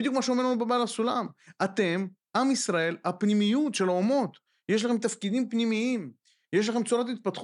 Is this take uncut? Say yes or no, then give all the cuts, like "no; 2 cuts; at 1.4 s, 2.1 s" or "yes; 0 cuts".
yes; 0 cuts